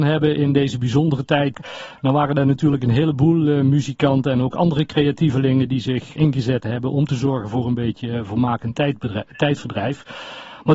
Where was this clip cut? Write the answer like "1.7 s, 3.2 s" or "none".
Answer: 1.5 s, 6.2 s

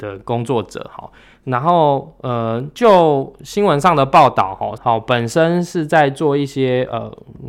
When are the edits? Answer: 4.8 s

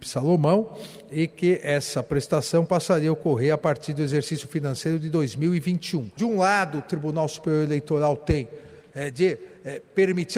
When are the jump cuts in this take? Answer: 6.2 s

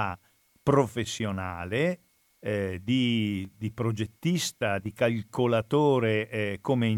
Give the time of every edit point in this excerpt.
none

